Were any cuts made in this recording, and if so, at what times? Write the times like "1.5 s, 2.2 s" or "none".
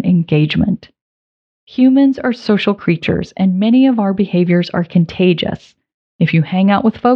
6.1 s